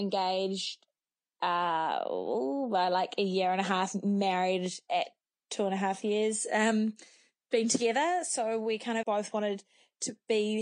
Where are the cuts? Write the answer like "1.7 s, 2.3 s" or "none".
9.0 s